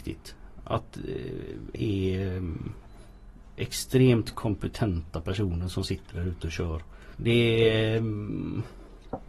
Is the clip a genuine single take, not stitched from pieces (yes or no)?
no